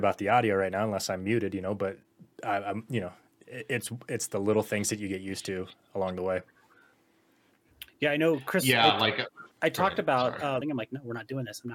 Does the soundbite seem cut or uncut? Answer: cut